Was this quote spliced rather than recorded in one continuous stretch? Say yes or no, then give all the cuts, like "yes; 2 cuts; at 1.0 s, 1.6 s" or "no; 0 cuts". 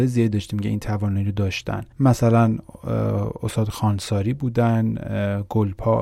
yes; 1 cut; at 1.9 s